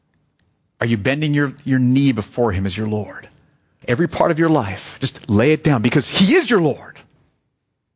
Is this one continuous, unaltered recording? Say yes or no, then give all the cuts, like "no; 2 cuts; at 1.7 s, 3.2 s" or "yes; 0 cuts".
no; 1 cut; at 3.8 s